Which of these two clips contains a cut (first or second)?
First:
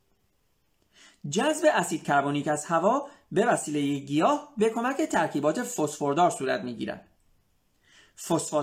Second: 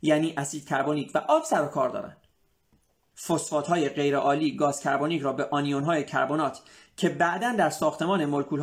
second